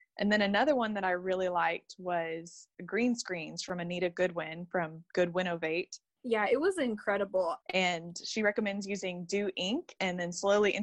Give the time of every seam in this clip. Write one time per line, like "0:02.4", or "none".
0:06.1
0:07.6